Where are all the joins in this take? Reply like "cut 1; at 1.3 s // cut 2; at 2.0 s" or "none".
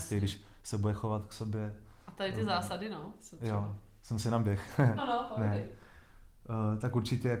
cut 1; at 5.0 s